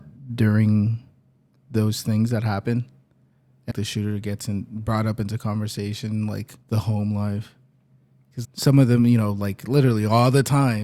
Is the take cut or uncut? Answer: cut